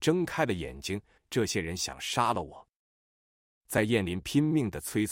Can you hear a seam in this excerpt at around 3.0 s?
no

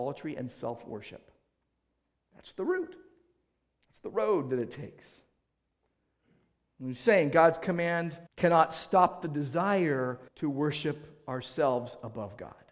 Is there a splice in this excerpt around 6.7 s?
no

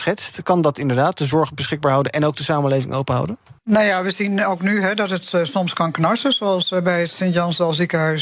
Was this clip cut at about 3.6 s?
yes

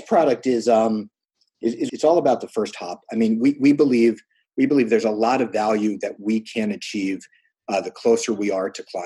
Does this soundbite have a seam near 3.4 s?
no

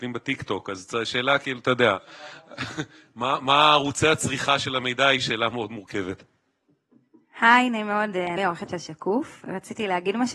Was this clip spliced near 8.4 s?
yes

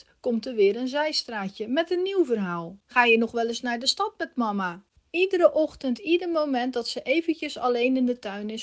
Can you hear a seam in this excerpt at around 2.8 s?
yes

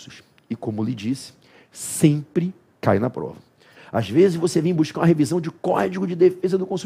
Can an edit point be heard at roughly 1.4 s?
no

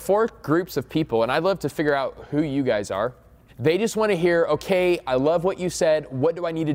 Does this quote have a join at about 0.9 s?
no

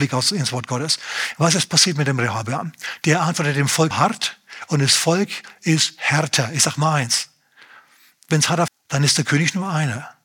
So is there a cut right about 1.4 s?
no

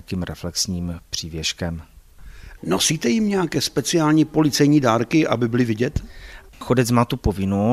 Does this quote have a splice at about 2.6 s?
yes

